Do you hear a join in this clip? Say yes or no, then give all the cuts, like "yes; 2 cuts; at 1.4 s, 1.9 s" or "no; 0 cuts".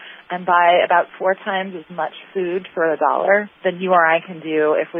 yes; 1 cut; at 3.5 s